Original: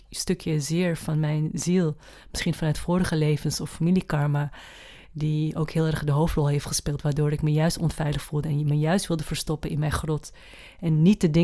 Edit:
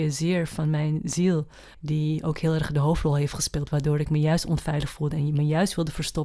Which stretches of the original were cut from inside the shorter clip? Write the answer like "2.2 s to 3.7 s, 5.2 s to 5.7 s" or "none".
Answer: 2.2 s to 5.1 s